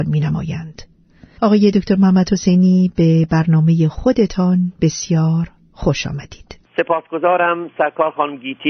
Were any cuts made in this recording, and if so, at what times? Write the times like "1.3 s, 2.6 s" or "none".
1.4 s, 6.7 s